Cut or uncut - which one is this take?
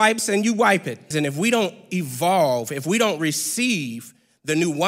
cut